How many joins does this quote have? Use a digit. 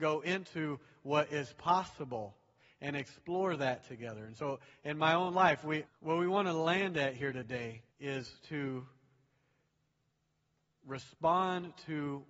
2